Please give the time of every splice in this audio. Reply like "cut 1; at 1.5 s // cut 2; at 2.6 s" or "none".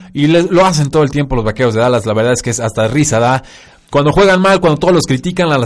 none